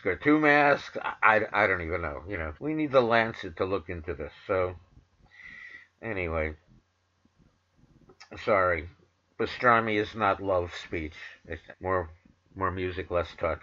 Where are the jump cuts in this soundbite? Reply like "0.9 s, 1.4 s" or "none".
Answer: 2.6 s, 11.7 s